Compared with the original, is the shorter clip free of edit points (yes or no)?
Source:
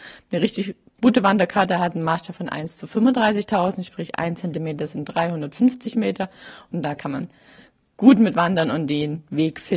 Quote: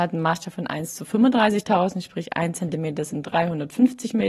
yes